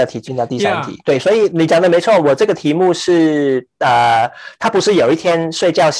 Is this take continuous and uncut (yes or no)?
yes